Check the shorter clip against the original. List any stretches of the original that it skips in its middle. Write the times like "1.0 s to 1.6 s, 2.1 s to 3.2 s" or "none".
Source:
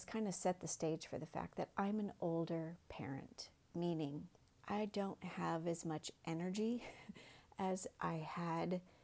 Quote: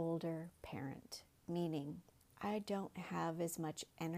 none